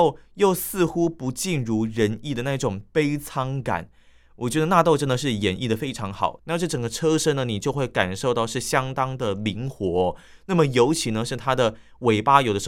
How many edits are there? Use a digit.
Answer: 1